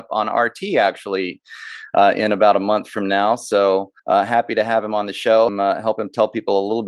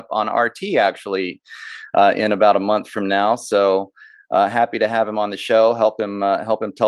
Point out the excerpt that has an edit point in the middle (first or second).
first